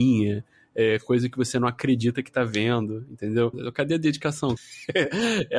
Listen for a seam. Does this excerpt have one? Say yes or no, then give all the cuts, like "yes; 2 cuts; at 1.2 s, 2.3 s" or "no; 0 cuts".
yes; 2 cuts; at 3.5 s, 4.6 s